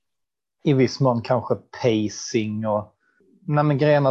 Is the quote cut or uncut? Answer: uncut